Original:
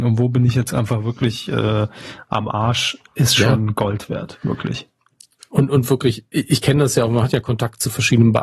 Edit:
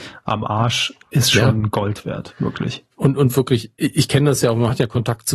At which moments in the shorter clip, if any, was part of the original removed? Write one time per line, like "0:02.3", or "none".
0:02.9